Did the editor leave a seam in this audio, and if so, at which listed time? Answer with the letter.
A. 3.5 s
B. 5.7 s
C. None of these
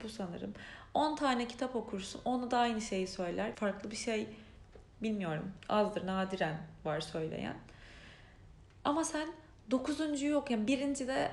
A